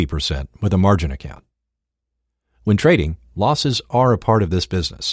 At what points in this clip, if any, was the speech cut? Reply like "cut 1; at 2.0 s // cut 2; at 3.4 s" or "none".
none